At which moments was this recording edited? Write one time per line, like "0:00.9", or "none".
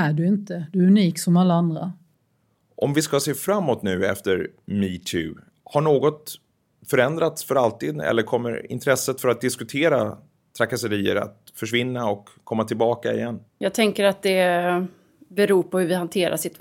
0:05.5
0:13.5